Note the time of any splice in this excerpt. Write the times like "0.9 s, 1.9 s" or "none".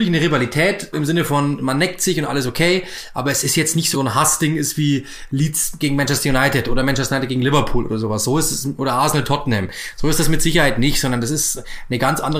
0.9 s, 3.9 s